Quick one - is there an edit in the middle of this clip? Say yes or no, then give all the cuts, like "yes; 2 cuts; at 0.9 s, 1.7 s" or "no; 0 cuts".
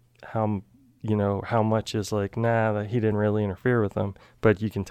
no; 0 cuts